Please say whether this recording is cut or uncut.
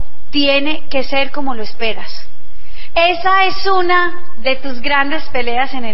cut